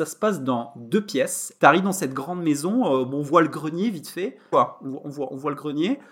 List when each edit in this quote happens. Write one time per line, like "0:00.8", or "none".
0:01.6
0:04.5